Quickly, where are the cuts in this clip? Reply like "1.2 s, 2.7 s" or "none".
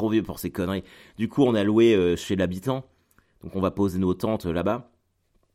none